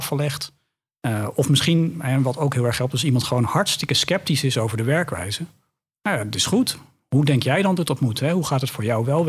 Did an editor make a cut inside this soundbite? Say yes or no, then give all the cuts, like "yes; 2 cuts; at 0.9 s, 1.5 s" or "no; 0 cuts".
no; 0 cuts